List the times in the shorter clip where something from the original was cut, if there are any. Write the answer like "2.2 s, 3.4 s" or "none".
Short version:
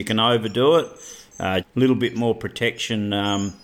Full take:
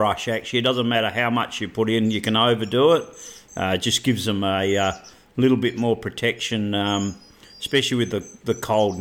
1.6 s